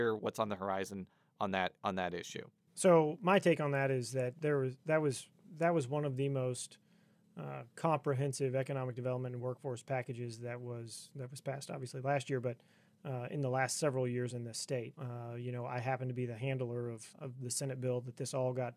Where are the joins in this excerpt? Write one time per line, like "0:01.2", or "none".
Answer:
0:14.9
0:17.1